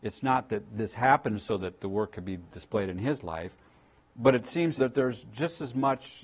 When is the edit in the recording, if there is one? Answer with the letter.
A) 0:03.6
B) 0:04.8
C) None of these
B